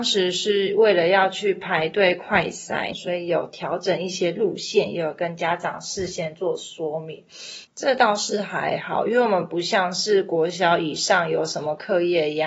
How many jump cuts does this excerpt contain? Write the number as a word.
two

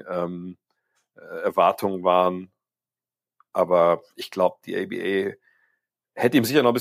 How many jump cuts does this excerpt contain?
zero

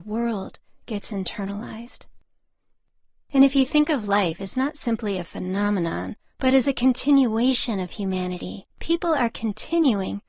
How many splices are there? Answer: two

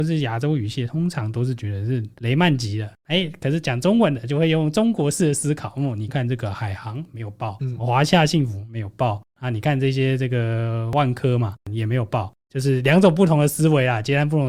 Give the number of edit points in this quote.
one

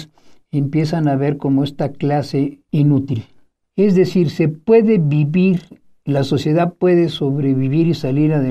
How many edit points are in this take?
one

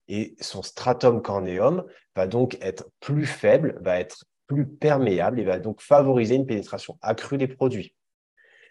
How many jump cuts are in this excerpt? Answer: zero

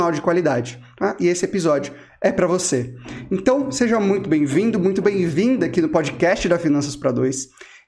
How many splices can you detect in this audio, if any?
zero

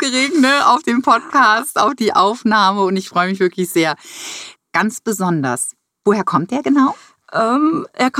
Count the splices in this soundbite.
one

